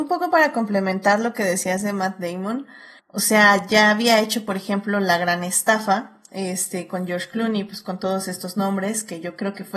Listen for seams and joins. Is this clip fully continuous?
no; 1 cut; at 3.0 s

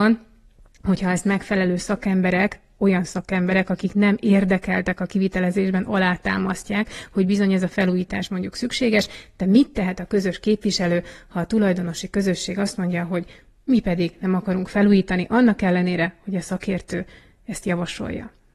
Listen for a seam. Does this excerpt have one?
no; 0 cuts

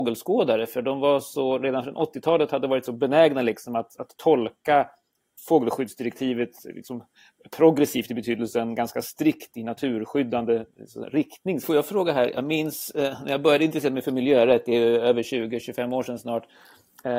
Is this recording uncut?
no; 1 cut; at 11.6 s

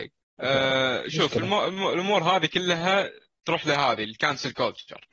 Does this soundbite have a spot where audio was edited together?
no; 0 cuts

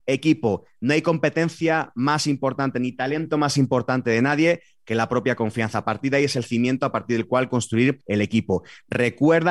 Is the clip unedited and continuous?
yes; 0 cuts

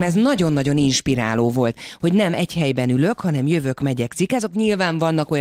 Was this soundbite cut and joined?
yes; 1 cut; at 1.7 s

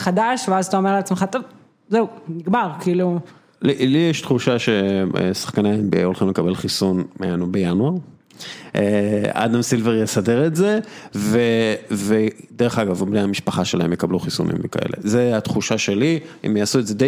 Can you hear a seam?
no; 0 cuts

